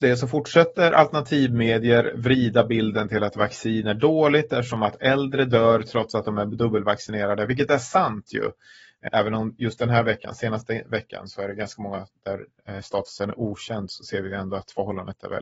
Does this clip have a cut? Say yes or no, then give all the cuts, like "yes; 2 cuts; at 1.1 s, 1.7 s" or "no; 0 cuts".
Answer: yes; 1 cut; at 9.1 s